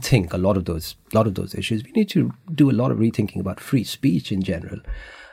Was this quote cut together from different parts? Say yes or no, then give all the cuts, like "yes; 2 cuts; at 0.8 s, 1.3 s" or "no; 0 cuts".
no; 0 cuts